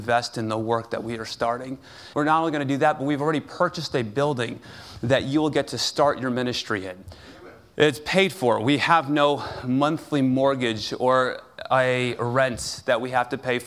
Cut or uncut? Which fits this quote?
cut